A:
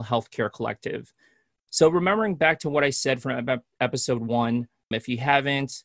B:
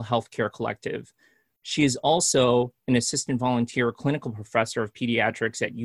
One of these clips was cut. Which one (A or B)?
A